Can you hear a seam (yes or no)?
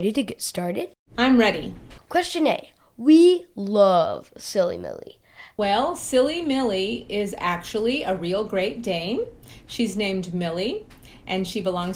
yes